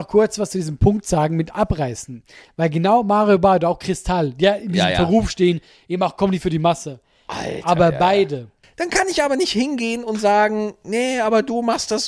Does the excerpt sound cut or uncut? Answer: cut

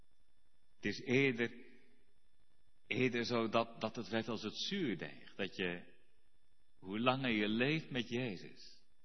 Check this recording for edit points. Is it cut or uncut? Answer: uncut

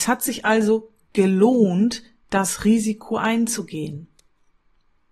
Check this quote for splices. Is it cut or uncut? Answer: uncut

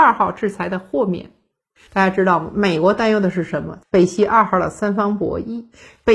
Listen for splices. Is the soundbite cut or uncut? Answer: cut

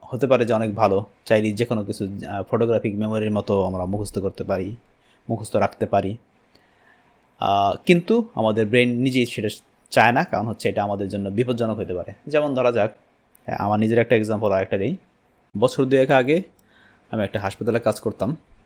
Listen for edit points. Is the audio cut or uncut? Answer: uncut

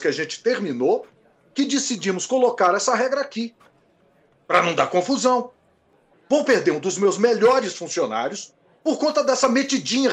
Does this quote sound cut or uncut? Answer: cut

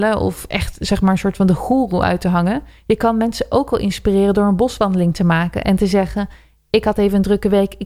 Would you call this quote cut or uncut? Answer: uncut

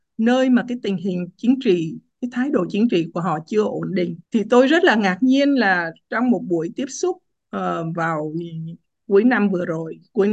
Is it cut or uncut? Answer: cut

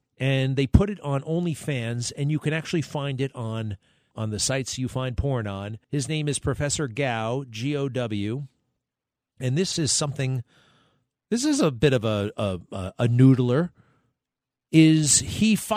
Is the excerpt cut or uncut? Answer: cut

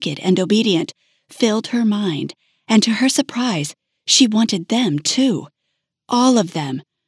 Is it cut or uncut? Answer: uncut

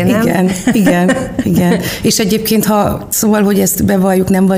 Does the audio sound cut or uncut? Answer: uncut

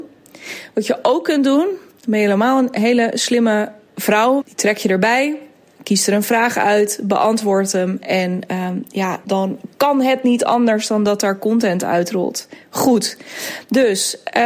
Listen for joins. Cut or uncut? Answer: cut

